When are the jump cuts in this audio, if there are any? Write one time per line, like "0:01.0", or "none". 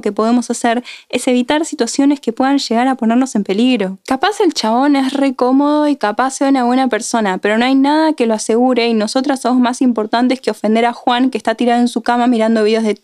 none